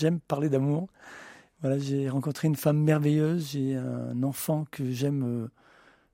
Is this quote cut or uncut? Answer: uncut